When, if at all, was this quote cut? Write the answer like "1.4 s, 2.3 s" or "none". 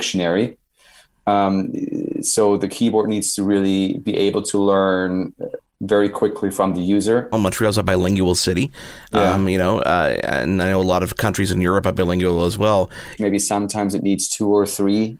7.3 s, 13.2 s